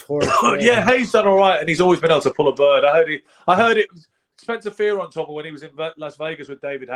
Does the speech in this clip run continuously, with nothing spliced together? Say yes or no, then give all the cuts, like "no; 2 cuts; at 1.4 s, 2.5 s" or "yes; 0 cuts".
yes; 0 cuts